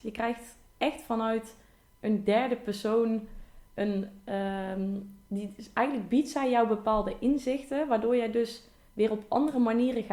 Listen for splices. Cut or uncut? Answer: uncut